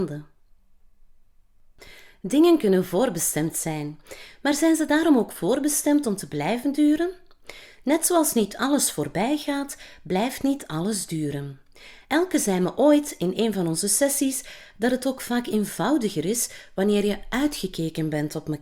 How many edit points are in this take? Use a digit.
0